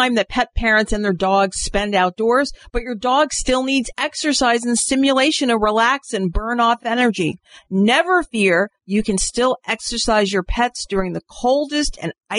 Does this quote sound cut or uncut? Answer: uncut